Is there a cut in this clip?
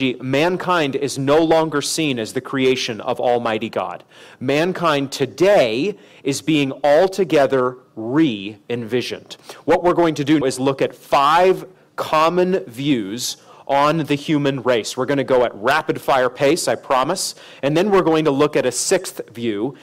yes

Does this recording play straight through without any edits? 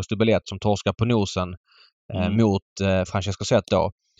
no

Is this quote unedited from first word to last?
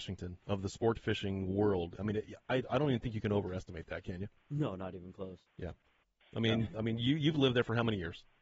yes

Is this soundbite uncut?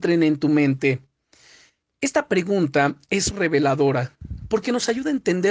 no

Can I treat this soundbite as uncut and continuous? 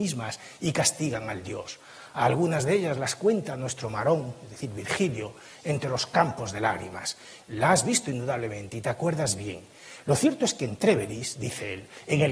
no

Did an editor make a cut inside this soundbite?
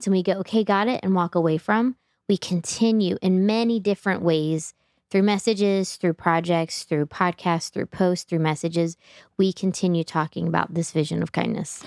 no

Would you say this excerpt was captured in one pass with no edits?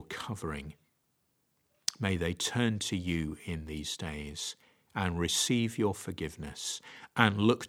yes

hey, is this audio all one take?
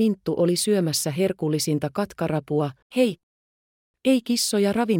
no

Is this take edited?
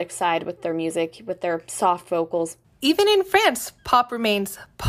yes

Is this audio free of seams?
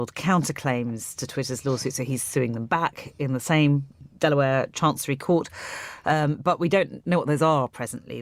yes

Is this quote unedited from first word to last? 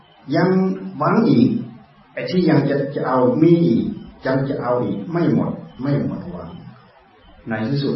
yes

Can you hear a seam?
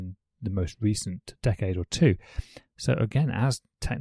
yes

